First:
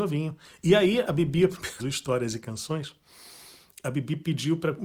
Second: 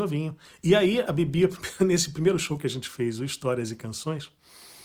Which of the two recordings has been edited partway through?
first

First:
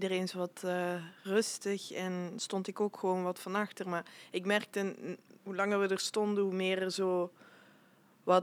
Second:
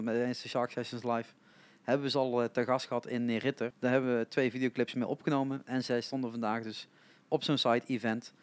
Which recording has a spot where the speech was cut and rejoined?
second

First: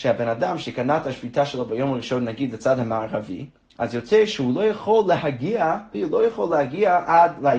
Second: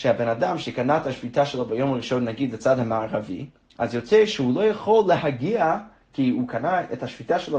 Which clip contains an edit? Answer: first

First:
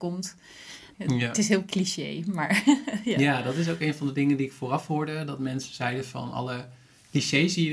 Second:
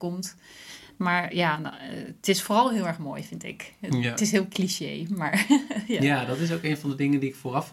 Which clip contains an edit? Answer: first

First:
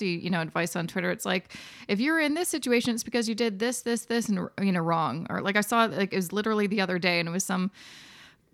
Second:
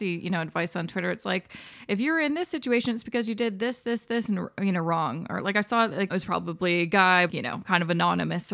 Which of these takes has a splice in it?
second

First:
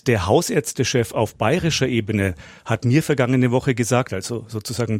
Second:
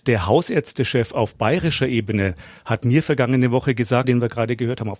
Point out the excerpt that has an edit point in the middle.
second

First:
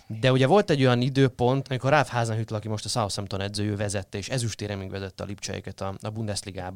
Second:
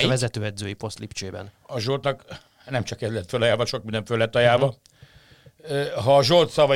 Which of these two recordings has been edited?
first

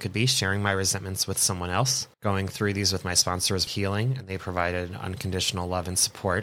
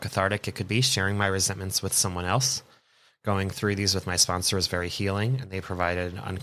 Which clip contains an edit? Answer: first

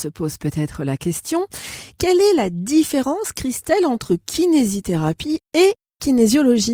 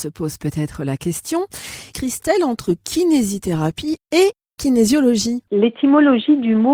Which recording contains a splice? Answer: second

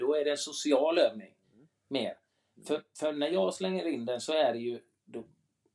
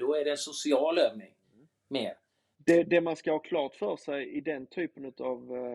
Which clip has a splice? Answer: second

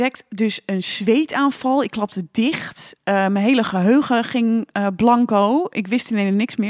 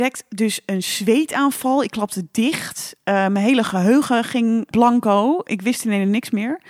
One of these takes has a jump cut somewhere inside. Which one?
second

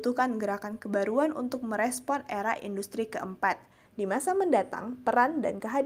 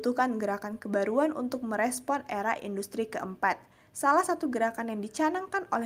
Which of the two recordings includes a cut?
first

